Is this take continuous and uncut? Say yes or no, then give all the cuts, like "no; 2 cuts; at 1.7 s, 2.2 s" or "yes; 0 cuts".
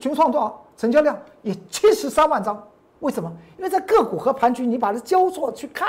no; 1 cut; at 3.0 s